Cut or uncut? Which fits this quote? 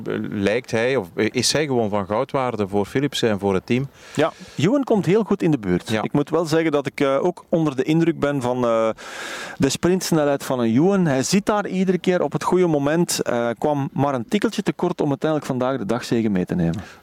uncut